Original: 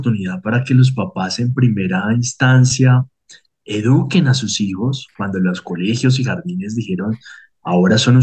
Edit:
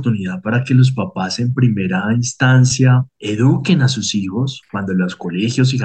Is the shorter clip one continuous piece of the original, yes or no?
no